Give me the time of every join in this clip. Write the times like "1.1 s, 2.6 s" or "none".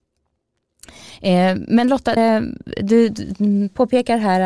2.2 s